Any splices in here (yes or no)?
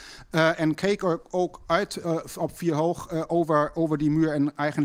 no